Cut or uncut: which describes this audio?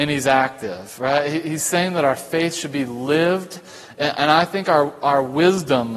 uncut